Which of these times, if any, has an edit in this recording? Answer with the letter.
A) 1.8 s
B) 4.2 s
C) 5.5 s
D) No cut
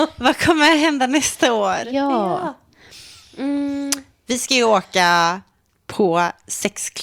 D